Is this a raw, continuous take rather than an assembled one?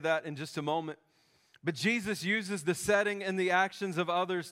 yes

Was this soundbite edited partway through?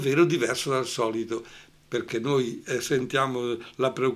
yes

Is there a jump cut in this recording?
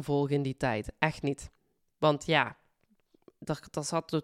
no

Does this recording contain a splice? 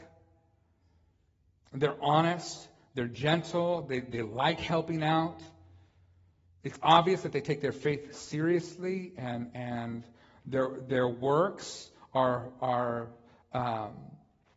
no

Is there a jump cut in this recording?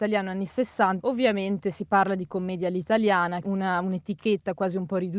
yes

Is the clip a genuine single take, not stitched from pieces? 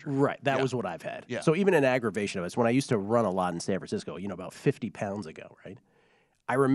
yes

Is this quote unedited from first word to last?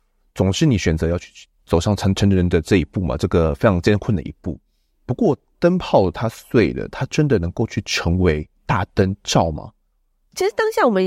yes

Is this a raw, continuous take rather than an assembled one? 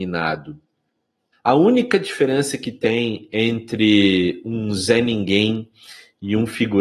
no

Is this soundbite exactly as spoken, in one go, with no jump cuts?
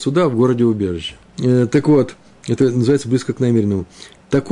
no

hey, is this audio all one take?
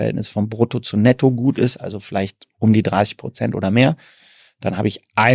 yes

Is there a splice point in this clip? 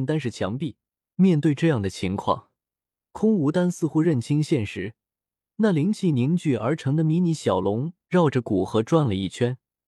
yes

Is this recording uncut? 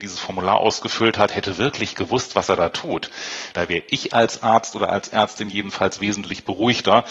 no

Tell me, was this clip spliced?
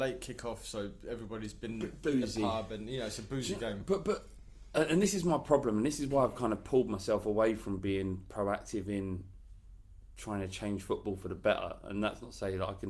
no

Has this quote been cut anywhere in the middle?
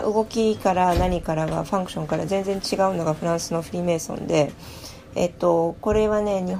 yes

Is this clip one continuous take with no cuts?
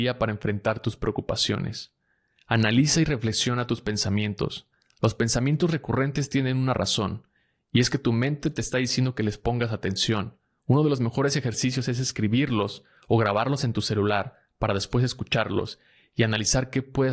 yes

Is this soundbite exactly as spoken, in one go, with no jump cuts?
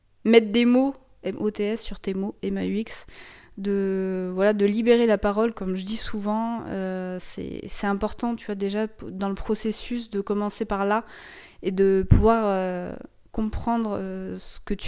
yes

